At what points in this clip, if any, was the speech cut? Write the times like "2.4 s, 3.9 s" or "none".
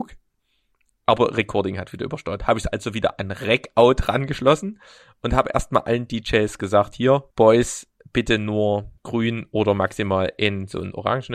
7.3 s, 9.0 s